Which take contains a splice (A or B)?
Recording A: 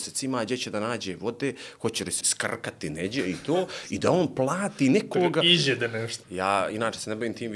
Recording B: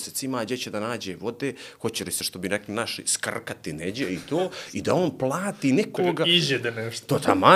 A